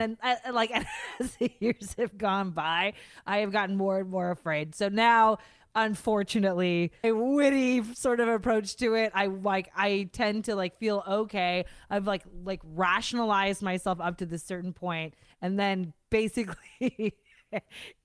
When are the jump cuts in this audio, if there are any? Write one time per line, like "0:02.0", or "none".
0:07.0